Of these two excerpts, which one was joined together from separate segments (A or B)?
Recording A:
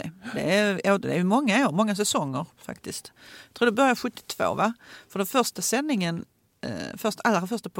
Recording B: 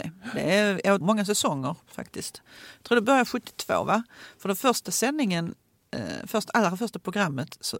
B